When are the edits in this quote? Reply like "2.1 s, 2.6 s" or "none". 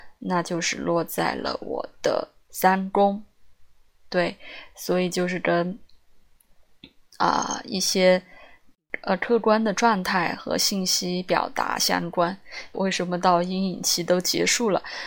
12.7 s